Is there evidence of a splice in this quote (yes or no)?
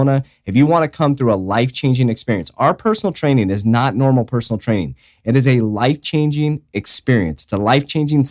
no